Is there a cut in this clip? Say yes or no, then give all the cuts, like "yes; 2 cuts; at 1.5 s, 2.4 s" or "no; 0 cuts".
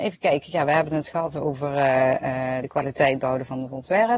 no; 0 cuts